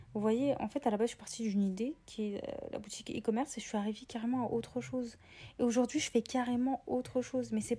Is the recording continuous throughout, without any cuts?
yes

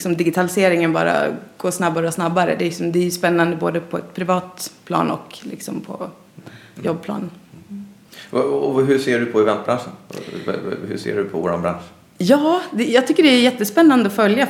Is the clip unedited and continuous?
yes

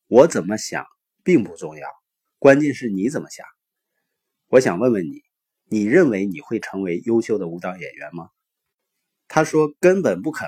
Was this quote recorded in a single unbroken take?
yes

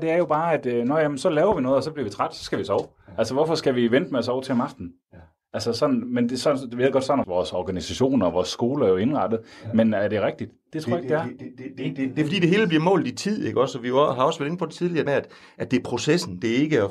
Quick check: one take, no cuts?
no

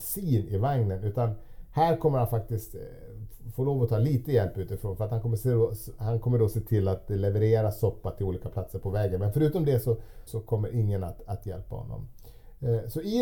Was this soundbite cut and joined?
yes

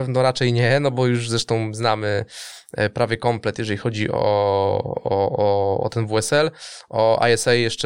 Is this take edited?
no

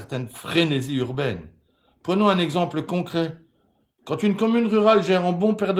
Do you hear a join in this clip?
no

